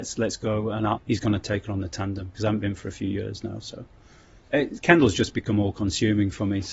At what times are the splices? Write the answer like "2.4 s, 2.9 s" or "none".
1.0 s, 4.4 s